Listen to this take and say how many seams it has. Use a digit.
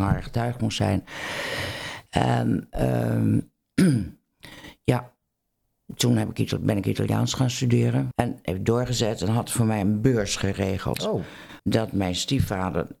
2